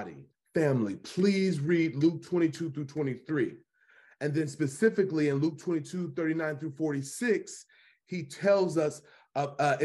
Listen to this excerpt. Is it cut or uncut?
uncut